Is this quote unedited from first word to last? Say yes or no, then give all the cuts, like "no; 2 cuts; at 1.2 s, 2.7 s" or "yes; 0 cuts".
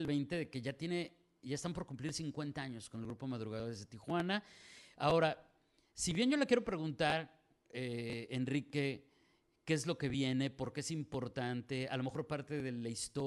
yes; 0 cuts